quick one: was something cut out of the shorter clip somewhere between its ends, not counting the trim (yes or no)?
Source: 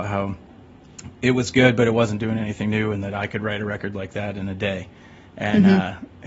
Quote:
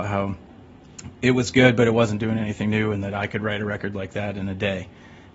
no